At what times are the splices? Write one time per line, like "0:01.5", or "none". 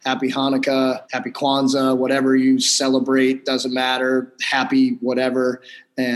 0:01.0